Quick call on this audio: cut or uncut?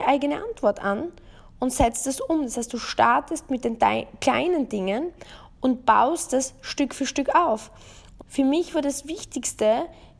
cut